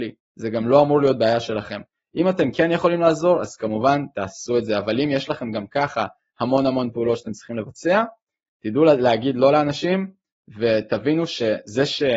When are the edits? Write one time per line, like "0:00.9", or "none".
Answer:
none